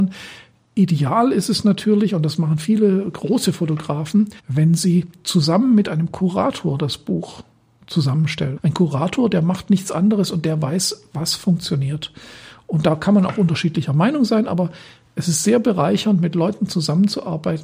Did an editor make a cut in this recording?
yes; 2 cuts; at 4.4 s, 8.6 s

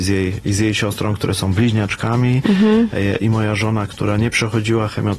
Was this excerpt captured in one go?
yes; 0 cuts

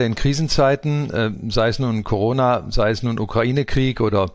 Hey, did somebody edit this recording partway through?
no; 0 cuts

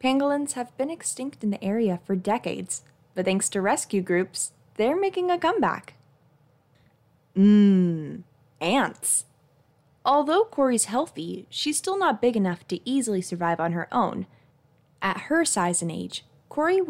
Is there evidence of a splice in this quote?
no; 0 cuts

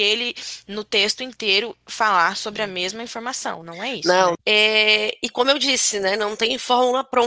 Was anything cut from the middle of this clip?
yes; 1 cut; at 4.3 s

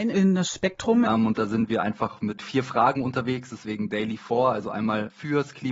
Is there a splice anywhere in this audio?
yes; 1 cut; at 1.0 s

